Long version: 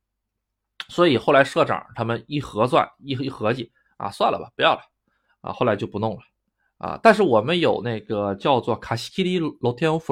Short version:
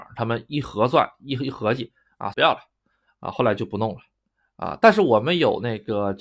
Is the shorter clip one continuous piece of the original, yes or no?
no